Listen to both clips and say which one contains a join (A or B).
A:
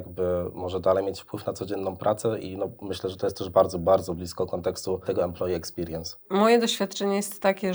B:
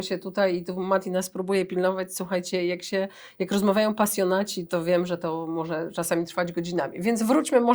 B